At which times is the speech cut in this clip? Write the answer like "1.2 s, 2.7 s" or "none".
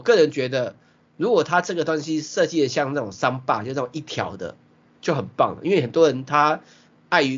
none

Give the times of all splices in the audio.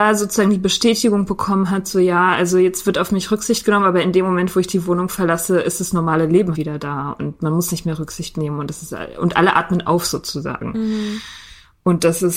6.5 s

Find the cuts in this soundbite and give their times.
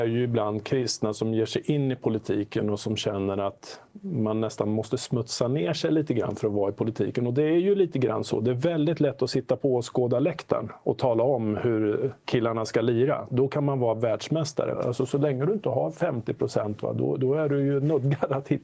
12.2 s, 14.7 s

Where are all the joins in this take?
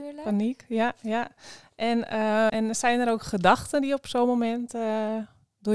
2.5 s

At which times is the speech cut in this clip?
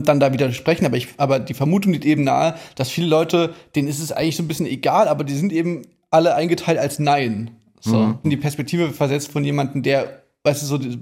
8.2 s

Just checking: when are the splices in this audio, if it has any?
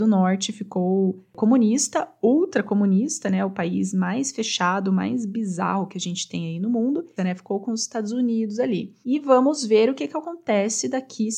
7.2 s, 9.0 s

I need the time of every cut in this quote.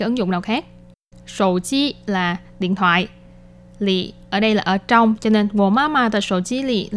1.1 s

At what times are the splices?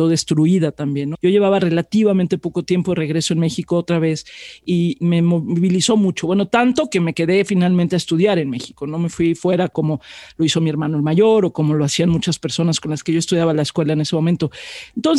1.1 s

